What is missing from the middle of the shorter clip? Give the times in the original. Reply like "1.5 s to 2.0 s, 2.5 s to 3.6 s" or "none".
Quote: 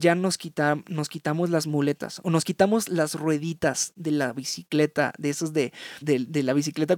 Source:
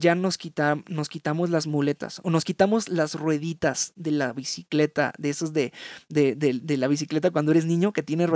6.0 s to 6.4 s